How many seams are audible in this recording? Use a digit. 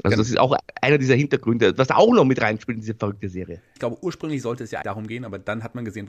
2